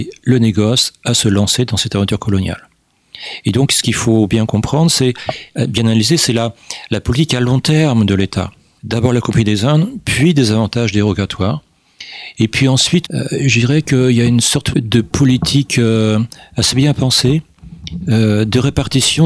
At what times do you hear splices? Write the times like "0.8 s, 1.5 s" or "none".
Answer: 8.8 s, 13.0 s, 14.7 s